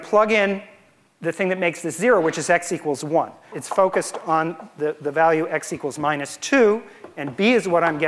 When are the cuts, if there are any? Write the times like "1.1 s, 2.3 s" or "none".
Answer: 3.5 s